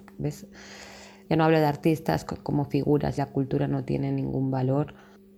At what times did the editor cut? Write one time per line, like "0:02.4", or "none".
0:01.3
0:03.2